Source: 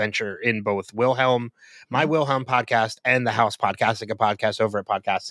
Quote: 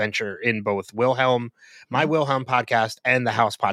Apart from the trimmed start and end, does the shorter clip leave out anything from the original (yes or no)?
no